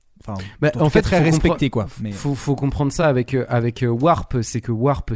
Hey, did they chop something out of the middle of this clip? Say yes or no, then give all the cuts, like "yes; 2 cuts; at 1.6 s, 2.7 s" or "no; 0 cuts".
no; 0 cuts